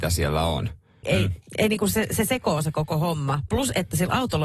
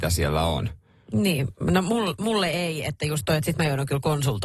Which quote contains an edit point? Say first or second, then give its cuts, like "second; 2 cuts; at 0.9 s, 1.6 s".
first; 1 cut; at 1.0 s